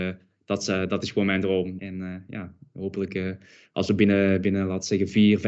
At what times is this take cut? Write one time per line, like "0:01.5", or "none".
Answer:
0:01.8